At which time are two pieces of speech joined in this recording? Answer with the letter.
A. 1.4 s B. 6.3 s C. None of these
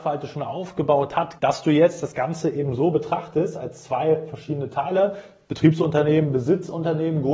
A